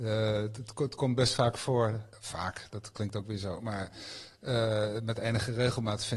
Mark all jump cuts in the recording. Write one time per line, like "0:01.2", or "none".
none